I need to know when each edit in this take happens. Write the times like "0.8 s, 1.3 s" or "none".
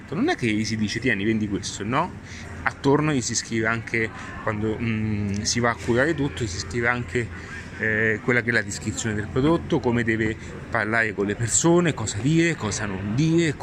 none

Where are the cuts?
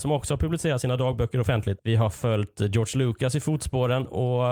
1.8 s

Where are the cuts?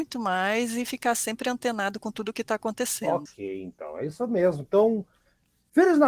none

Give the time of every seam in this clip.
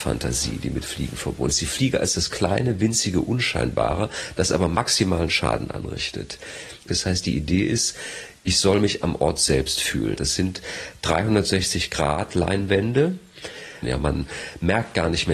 6.9 s, 10.2 s, 13.8 s

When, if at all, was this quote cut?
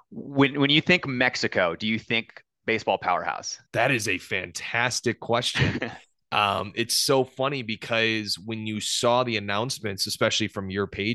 3.7 s

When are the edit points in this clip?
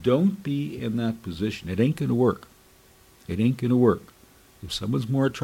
none

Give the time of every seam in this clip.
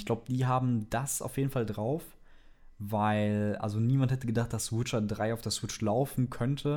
none

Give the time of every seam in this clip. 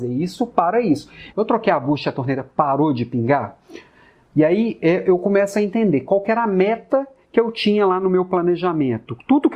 1.3 s

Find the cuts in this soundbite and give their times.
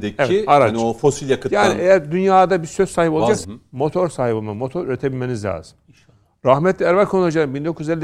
3.4 s

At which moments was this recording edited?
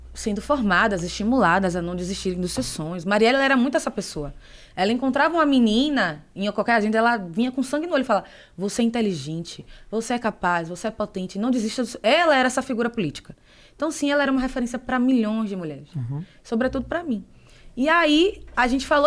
none

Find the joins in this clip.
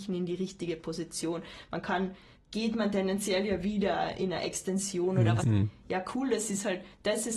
2.3 s, 5.4 s

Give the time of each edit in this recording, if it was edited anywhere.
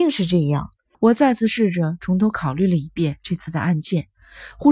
0.9 s

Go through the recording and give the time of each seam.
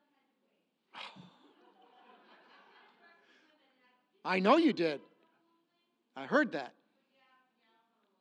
none

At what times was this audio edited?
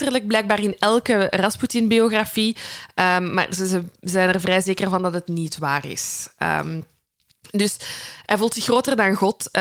none

